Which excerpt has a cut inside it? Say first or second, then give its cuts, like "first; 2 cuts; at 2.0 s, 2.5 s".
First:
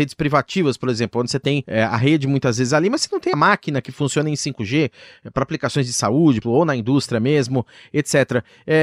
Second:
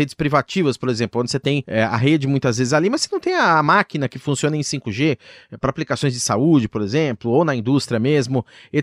first; 2 cuts; at 3.3 s, 6.4 s